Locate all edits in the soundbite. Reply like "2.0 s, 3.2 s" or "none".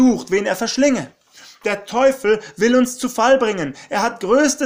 none